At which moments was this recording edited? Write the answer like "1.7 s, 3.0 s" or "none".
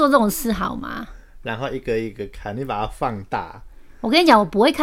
none